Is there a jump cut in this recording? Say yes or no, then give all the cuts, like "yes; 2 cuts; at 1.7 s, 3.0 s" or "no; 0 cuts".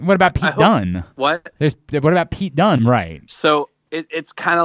yes; 2 cuts; at 1.1 s, 2.8 s